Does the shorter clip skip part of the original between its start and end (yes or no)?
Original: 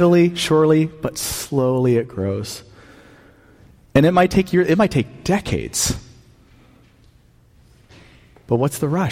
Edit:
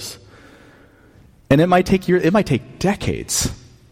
no